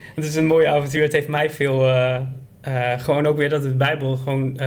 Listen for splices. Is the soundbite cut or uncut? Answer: uncut